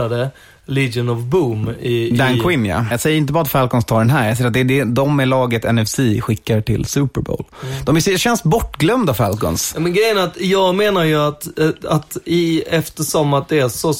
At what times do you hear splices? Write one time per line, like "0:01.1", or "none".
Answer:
0:02.9